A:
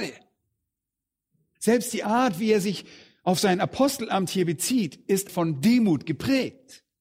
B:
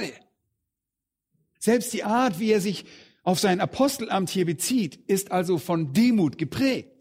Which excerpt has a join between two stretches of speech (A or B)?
A